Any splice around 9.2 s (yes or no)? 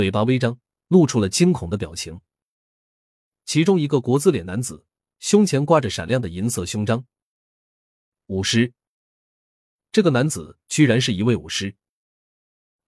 no